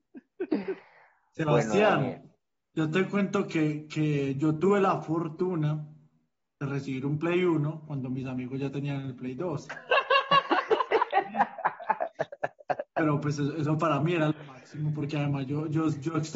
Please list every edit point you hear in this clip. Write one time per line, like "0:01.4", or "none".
none